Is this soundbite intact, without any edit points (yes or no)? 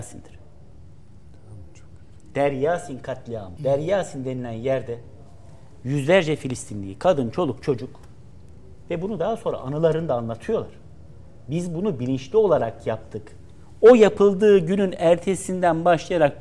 no